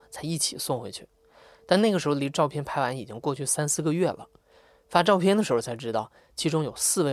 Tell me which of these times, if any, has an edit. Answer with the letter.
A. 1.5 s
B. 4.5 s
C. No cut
C